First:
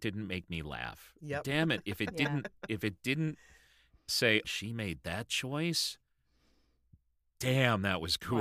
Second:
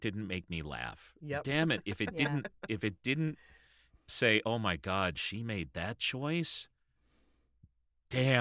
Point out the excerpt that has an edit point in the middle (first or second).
first